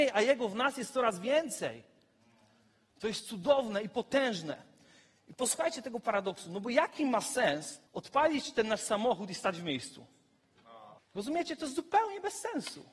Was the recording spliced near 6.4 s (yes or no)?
no